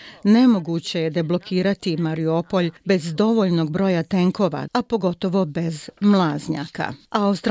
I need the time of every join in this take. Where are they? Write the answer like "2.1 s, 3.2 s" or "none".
4.7 s